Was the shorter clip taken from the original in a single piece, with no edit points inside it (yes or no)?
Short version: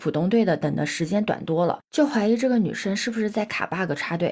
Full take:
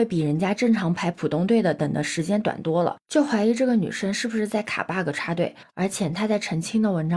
yes